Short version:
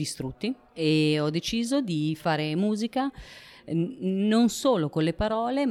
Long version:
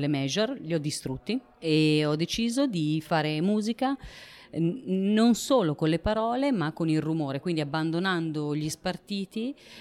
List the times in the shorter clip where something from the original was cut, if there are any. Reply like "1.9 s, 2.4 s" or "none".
none